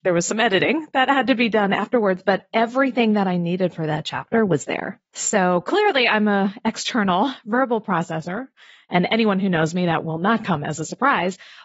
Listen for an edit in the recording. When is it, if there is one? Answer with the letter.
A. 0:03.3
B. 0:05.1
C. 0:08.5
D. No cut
B